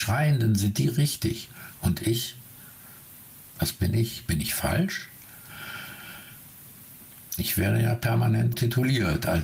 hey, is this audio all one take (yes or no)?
no